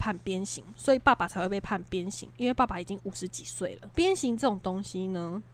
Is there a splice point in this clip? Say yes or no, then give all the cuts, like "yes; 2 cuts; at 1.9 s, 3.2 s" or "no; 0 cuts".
yes; 1 cut; at 3.9 s